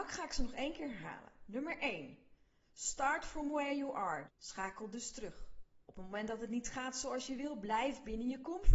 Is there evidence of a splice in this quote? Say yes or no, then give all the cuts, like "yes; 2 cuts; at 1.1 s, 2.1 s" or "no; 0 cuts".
yes; 2 cuts; at 4.2 s, 5.8 s